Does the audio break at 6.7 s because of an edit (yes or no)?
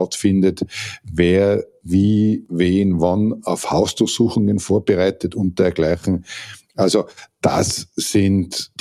no